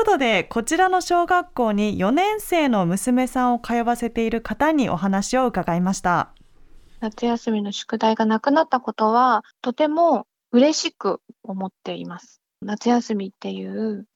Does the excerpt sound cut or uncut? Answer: uncut